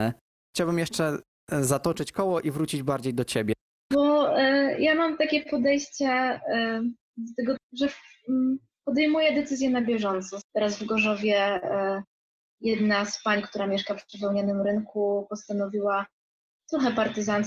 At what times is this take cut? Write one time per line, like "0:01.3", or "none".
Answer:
0:03.9
0:07.6
0:10.4